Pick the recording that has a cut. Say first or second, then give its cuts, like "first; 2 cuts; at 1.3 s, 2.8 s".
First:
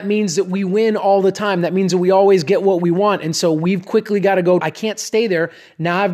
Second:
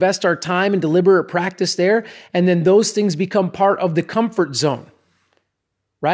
first; 1 cut; at 4.6 s